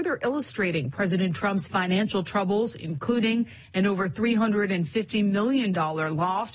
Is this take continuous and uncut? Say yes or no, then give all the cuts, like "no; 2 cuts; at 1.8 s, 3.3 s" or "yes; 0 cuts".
yes; 0 cuts